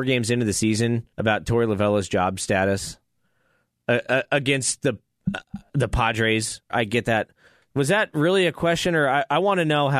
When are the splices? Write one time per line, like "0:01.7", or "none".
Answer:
0:01.1
0:06.7